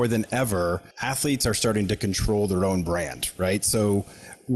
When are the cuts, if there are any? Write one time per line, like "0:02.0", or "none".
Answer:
0:00.9